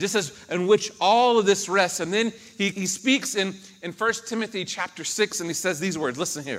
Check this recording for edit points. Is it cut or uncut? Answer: cut